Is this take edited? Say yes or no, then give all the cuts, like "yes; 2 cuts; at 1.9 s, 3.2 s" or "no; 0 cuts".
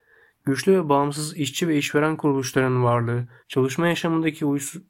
yes; 1 cut; at 3.4 s